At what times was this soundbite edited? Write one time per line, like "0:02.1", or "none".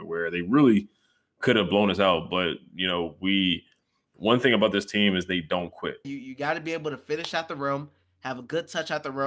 0:06.0